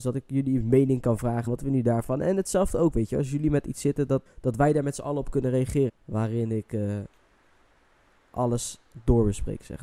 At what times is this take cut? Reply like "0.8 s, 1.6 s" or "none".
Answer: 1.5 s, 4.3 s, 5.9 s